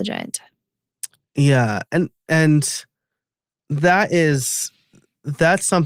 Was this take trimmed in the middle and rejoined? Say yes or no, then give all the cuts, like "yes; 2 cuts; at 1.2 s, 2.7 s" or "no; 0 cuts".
no; 0 cuts